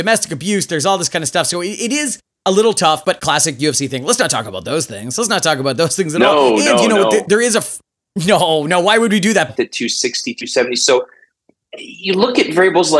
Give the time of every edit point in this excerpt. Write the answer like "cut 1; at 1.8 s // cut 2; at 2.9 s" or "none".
cut 1; at 9.5 s